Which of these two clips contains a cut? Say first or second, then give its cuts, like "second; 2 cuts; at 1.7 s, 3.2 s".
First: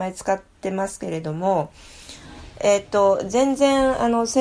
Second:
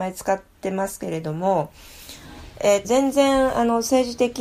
second; 1 cut; at 2.8 s